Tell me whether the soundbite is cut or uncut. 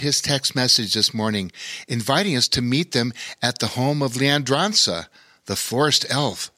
uncut